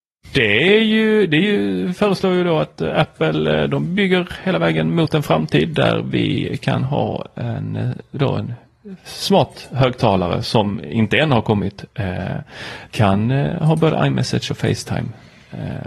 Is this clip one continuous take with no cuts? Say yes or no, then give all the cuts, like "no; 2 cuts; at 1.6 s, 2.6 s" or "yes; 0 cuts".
no; 1 cut; at 12.9 s